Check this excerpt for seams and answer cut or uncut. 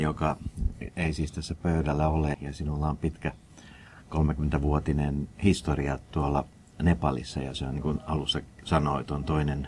cut